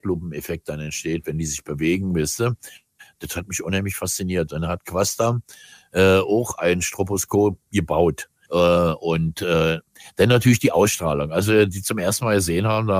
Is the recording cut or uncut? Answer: cut